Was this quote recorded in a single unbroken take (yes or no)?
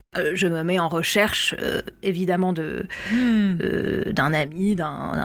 yes